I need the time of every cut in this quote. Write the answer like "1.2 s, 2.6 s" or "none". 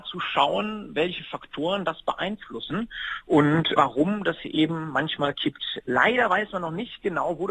4.4 s, 5.8 s

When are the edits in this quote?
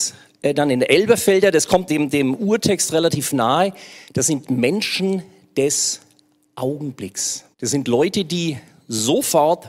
1.9 s, 7.5 s

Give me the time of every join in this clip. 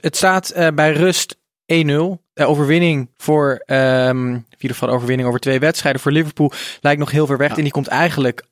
7.5 s

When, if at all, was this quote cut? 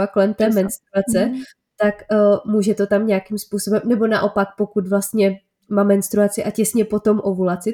none

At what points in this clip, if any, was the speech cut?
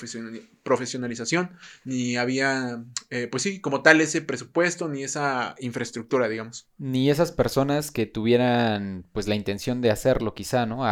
none

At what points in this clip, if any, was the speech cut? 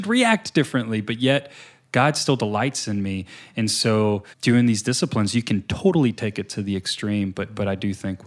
4.3 s

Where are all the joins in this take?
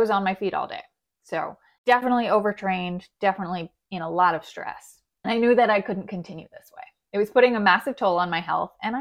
none

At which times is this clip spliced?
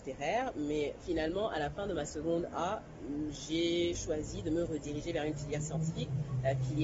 none

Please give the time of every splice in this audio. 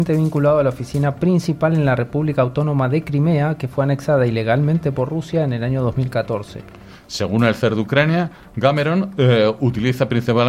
none

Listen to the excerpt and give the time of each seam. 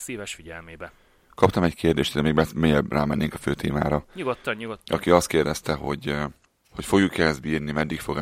none

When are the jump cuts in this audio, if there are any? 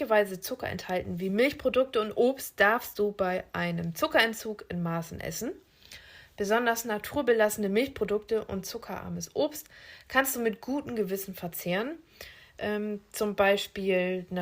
none

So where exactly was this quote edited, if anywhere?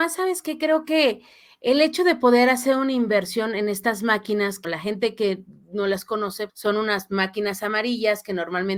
4.6 s, 6.5 s

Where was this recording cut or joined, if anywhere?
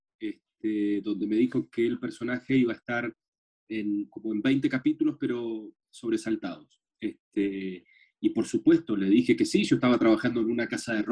none

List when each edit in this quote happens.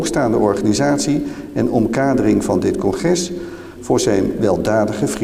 3.8 s

